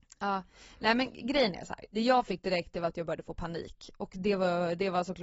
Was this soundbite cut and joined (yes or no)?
no